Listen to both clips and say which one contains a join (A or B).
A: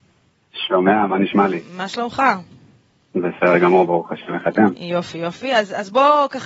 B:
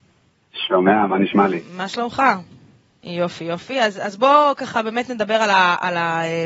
B